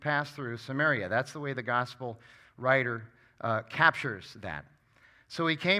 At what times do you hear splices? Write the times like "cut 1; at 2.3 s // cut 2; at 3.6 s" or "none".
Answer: none